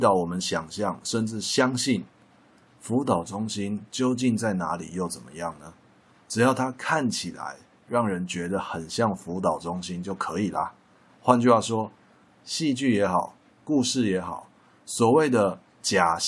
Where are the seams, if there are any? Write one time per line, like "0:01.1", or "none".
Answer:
none